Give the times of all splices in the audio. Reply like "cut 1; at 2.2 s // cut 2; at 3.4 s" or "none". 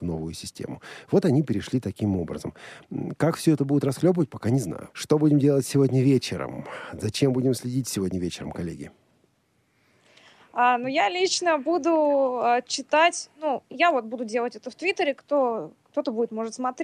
cut 1; at 4.9 s